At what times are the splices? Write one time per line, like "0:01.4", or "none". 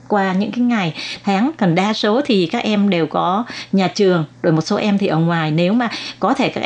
none